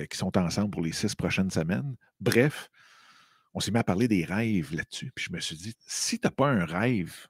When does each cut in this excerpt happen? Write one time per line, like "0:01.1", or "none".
0:05.7